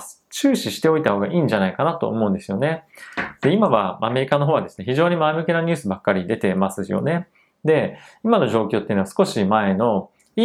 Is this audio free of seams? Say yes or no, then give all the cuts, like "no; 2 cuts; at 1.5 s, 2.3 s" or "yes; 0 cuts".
yes; 0 cuts